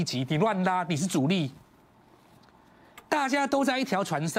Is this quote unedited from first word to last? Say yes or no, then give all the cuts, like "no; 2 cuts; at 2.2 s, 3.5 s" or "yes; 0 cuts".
yes; 0 cuts